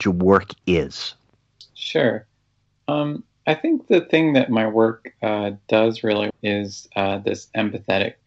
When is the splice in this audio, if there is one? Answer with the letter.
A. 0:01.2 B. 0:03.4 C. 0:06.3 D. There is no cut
C